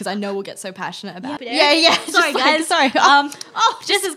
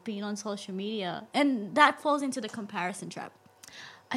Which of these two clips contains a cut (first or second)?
first